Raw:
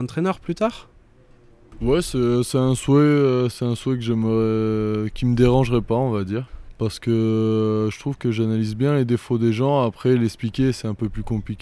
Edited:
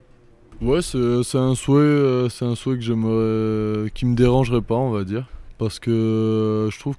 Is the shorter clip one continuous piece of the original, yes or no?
yes